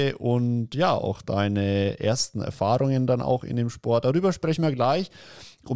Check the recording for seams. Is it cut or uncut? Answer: uncut